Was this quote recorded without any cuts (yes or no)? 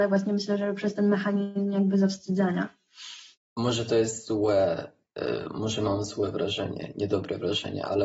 no